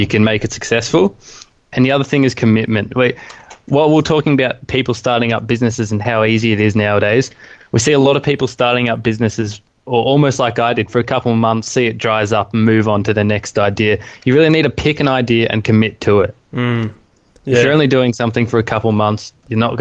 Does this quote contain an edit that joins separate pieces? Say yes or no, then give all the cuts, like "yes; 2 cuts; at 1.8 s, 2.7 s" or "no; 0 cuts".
no; 0 cuts